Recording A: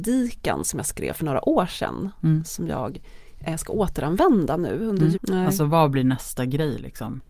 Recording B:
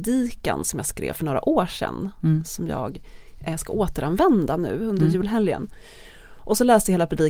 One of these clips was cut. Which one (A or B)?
A